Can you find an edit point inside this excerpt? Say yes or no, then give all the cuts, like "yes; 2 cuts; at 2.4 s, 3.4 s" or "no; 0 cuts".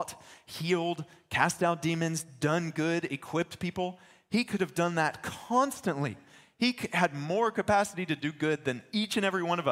no; 0 cuts